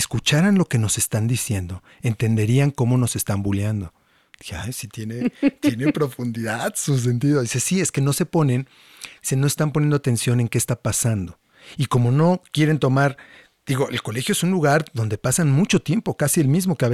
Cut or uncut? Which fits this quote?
uncut